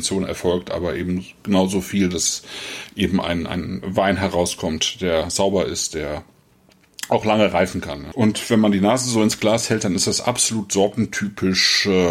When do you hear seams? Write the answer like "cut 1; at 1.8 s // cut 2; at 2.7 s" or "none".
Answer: cut 1; at 8.1 s

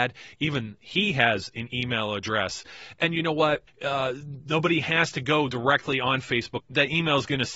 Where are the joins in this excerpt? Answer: cut 1; at 3.7 s // cut 2; at 6.6 s

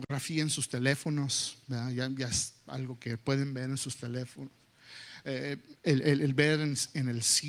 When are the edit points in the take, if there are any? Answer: none

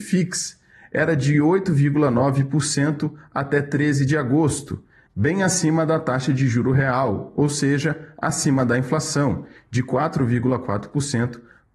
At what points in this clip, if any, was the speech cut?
none

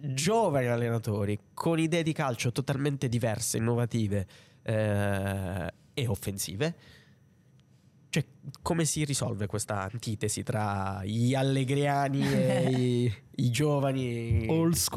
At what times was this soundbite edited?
none

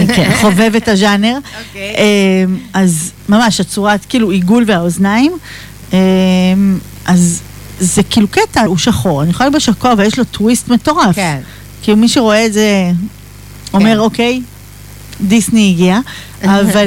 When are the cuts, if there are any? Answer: cut 1; at 3.2 s // cut 2; at 8.7 s

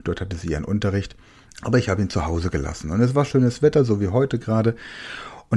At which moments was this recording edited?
cut 1; at 1.6 s

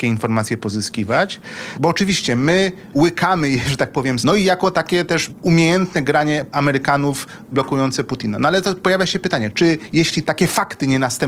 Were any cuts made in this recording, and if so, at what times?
cut 1; at 1.7 s // cut 2; at 2.9 s // cut 3; at 4.2 s

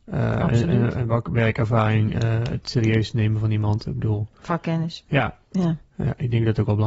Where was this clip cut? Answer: none

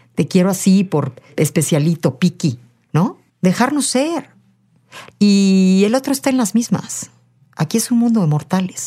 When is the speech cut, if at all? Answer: cut 1; at 3.3 s // cut 2; at 5.1 s

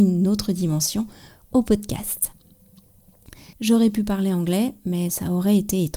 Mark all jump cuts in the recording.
cut 1; at 3.5 s

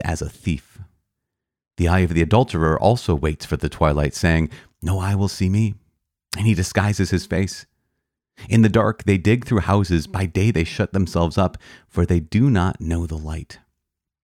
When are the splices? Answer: none

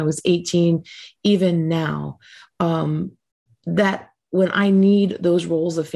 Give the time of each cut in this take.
none

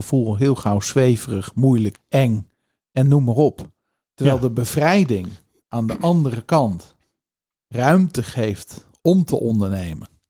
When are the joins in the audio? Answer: cut 1; at 1.9 s

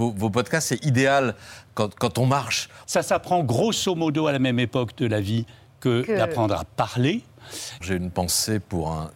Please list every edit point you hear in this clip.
cut 1; at 2.8 s // cut 2; at 7.8 s

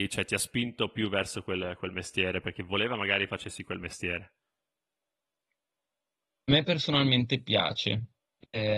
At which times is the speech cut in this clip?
cut 1; at 6.3 s

